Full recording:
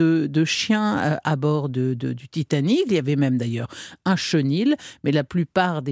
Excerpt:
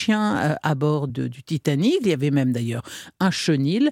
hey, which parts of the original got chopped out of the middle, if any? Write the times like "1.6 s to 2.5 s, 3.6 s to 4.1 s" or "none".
1.7 s to 1.9 s